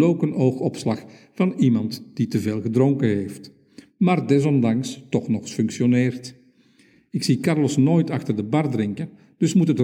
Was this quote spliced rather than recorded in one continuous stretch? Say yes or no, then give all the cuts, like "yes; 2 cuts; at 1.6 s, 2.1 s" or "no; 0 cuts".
no; 0 cuts